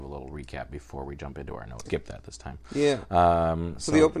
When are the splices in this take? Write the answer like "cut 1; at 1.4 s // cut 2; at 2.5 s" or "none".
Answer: cut 1; at 1.9 s